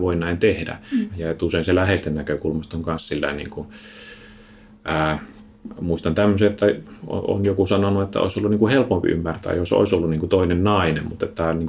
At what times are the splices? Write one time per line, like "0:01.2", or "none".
0:01.1